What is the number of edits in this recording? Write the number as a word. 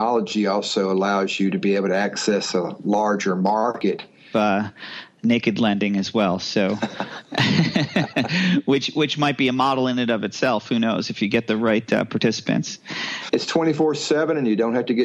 two